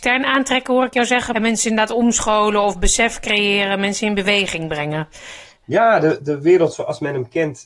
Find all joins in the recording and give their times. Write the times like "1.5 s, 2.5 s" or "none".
1.3 s